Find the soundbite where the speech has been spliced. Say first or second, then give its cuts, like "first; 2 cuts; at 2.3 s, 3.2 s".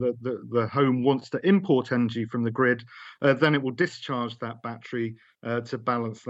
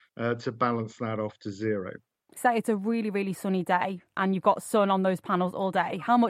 second; 1 cut; at 2.4 s